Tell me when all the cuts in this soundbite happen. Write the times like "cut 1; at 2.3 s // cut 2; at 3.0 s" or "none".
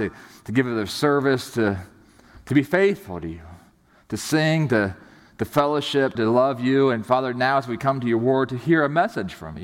cut 1; at 6.1 s